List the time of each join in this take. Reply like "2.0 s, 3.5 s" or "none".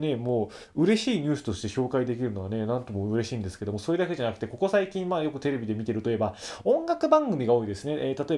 none